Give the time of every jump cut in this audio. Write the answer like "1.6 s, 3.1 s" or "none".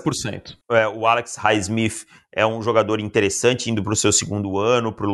none